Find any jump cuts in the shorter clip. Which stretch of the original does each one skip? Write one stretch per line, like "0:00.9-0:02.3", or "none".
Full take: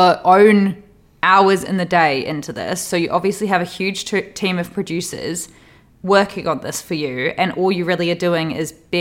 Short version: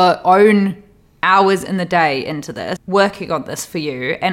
0:02.8-0:05.9